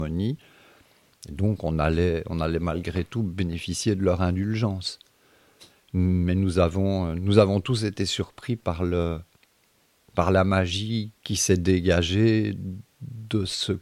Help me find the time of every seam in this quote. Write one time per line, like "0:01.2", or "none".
0:11.1